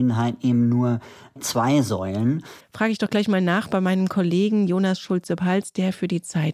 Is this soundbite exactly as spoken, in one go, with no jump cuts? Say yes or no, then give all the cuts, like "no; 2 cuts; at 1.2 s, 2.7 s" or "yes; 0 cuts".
no; 1 cut; at 2.6 s